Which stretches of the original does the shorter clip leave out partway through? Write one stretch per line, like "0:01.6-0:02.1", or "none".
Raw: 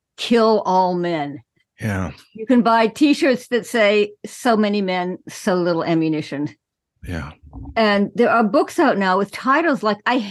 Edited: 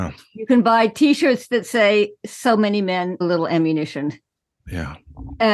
0:05.2-0:05.6